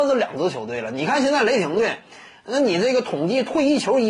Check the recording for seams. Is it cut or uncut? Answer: uncut